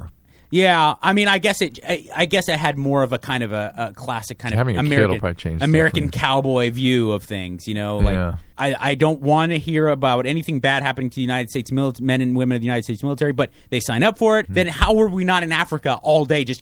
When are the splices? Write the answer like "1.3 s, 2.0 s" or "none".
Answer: 8.5 s, 14.5 s

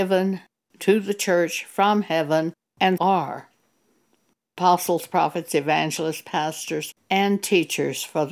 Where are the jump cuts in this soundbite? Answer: 3.0 s

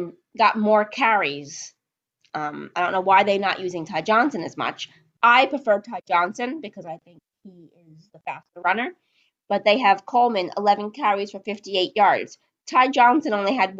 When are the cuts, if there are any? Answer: none

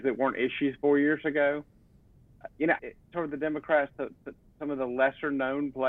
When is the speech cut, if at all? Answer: 2.8 s

